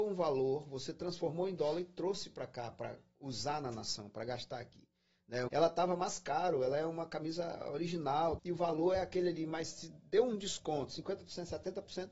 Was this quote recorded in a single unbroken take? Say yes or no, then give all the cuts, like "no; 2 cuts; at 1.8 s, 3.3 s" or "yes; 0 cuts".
no; 2 cuts; at 5.5 s, 8.4 s